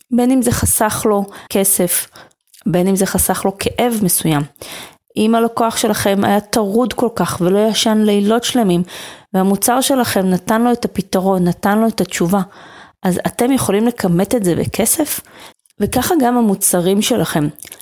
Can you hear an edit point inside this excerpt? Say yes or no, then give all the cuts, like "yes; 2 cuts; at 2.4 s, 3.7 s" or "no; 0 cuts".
yes; 2 cuts; at 1.5 s, 15.7 s